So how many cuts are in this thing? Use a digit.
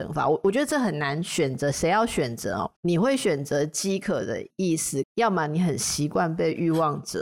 2